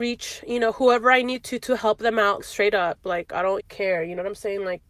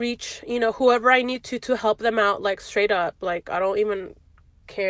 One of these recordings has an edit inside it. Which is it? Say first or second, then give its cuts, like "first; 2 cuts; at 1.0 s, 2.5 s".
first; 2 cuts; at 2.4 s, 3.6 s